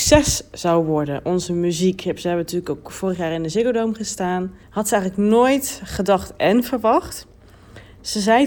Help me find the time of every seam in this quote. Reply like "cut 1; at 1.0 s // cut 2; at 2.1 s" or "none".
cut 1; at 4.6 s